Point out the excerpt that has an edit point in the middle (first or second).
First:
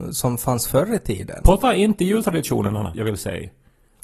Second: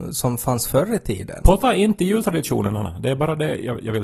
first